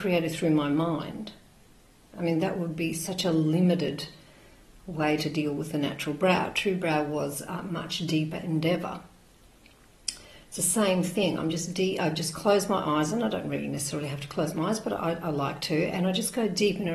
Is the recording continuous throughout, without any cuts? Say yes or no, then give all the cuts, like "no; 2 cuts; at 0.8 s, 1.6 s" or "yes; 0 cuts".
yes; 0 cuts